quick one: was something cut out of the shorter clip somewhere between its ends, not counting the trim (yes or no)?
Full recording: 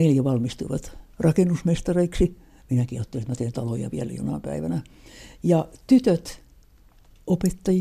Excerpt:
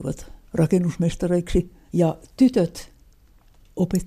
yes